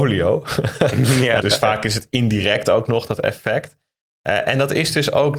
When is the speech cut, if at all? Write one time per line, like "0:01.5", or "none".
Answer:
0:01.4